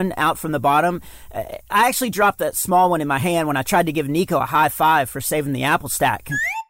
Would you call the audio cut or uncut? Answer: uncut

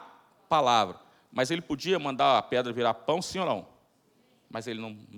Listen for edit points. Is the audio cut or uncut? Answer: uncut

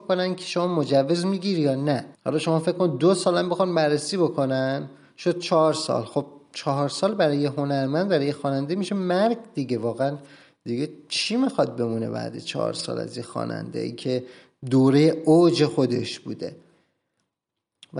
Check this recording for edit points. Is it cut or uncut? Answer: cut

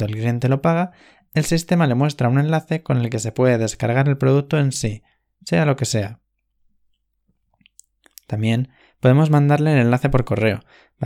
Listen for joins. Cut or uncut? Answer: uncut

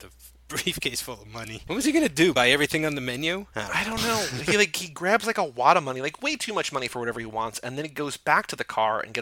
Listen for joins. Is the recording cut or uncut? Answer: uncut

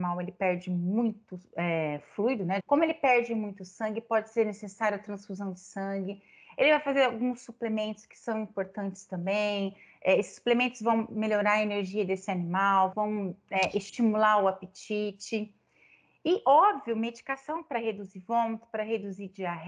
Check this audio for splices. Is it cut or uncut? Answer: cut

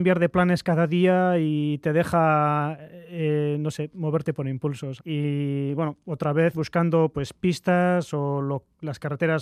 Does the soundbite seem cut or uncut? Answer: cut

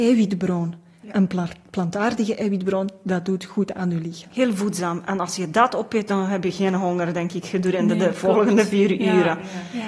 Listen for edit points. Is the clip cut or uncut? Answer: uncut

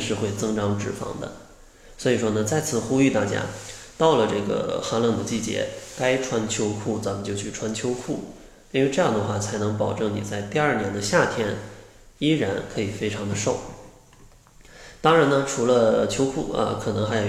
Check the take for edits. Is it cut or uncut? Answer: uncut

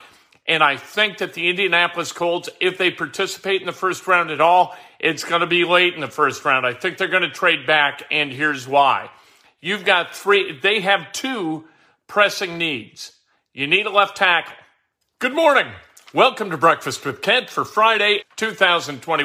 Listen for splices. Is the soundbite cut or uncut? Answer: cut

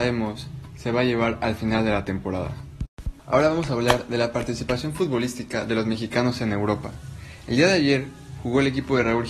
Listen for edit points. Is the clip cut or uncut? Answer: cut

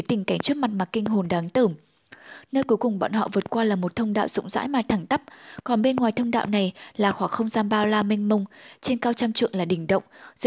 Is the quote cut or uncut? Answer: uncut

